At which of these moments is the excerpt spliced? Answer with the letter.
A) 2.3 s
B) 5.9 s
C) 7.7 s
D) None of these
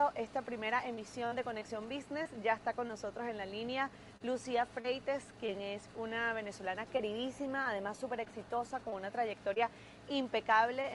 B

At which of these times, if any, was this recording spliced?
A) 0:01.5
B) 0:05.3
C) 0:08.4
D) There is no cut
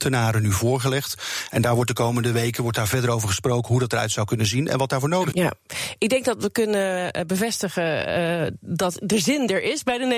B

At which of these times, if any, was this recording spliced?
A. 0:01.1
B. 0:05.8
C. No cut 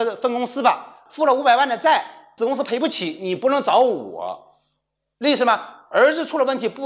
A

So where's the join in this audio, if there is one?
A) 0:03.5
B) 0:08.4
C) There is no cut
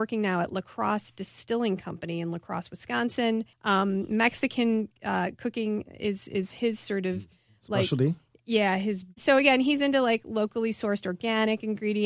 A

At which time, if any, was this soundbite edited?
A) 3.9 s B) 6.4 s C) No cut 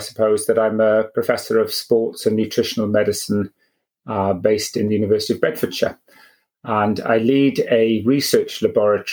C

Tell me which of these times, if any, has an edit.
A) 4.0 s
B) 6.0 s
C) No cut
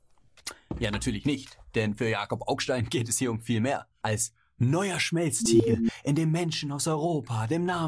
A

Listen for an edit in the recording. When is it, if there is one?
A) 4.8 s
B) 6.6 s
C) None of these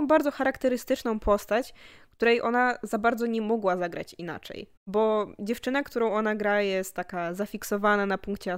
A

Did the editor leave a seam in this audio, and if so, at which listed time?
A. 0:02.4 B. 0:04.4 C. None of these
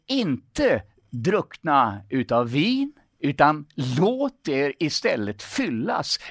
C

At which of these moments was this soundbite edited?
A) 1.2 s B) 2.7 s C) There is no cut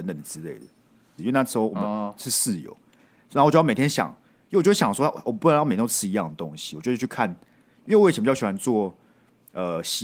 A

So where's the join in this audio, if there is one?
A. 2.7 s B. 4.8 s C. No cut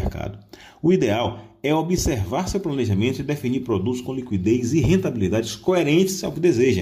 C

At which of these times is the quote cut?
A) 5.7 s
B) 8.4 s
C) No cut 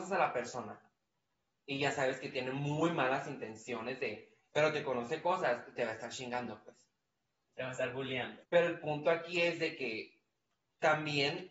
B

